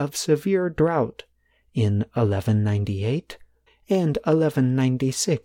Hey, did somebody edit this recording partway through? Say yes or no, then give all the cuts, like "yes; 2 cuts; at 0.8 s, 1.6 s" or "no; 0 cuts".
yes; 1 cut; at 3.7 s